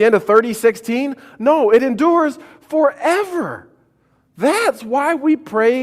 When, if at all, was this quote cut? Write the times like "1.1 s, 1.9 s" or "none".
none